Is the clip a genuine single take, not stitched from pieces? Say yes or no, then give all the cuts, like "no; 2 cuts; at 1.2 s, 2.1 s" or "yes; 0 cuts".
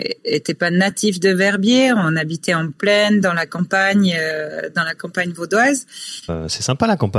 no; 1 cut; at 6.3 s